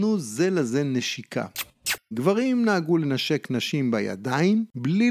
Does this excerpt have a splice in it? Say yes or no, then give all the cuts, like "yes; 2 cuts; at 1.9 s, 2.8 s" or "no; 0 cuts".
yes; 1 cut; at 2.1 s